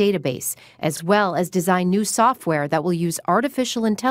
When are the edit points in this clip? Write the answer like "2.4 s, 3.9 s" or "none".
none